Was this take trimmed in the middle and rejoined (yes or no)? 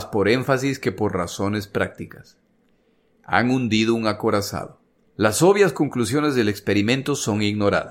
yes